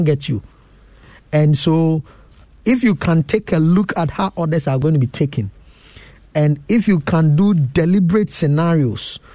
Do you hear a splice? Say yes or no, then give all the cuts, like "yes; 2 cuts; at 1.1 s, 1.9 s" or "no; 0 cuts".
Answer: no; 0 cuts